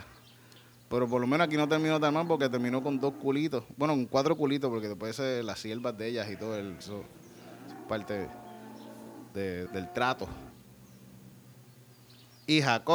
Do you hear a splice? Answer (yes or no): yes